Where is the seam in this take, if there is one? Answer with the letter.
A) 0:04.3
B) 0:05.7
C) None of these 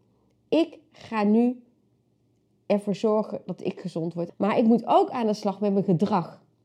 A